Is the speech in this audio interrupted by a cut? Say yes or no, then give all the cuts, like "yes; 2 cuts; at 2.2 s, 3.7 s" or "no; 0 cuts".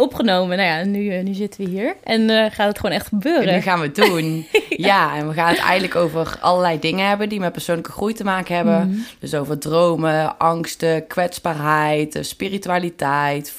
no; 0 cuts